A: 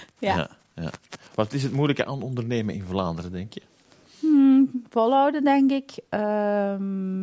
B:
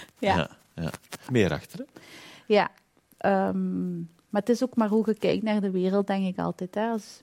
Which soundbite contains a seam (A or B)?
B